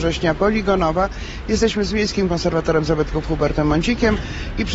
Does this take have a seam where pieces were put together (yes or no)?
no